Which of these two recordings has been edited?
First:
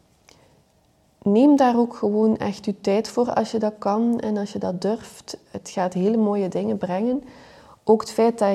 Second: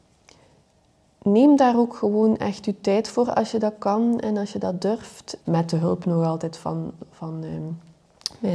second; 1 cut; at 5.4 s

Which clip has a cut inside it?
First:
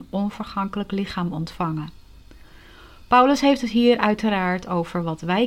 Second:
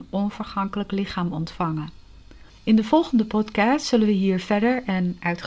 second; 1 cut; at 2.5 s

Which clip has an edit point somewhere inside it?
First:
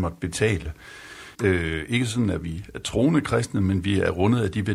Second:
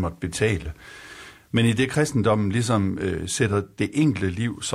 first; 1 cut; at 1.3 s

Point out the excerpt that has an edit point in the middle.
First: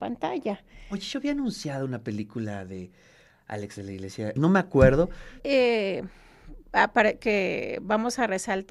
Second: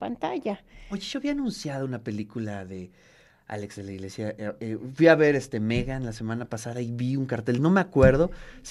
first; 2 cuts; at 4.4 s, 5.4 s

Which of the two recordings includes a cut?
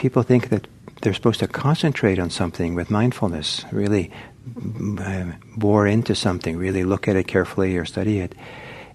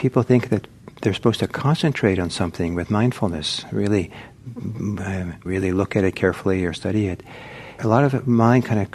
second; 2 cuts; at 5.4 s, 7.8 s

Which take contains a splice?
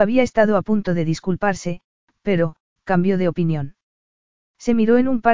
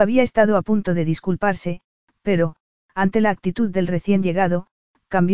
first; 1 cut; at 2.8 s

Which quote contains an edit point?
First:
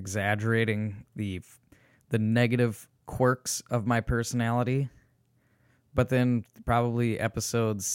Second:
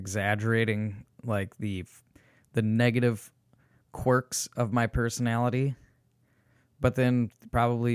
first; 2 cuts; at 1.1 s, 2.9 s

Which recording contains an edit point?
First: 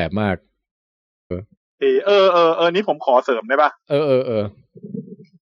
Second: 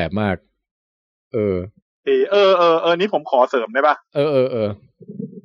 first; 1 cut; at 1.3 s

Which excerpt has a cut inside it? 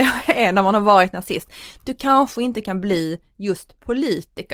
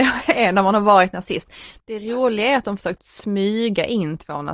second; 1 cut; at 1.8 s

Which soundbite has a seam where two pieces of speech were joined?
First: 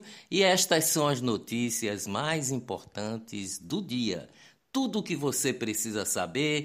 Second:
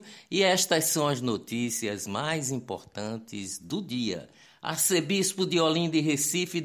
second; 1 cut; at 4.5 s

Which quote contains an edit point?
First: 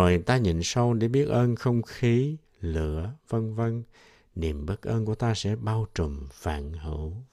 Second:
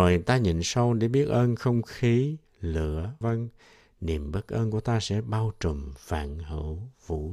second; 1 cut; at 3.2 s

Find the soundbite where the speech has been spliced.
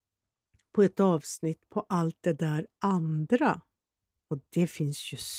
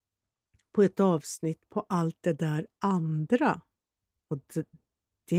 first; 1 cut; at 4.5 s

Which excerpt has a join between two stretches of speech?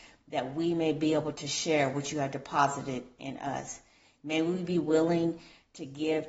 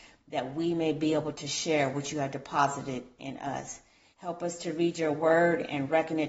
second; 1 cut; at 4.1 s

